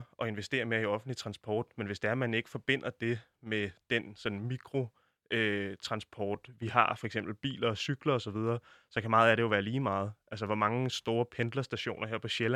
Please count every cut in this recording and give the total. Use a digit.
0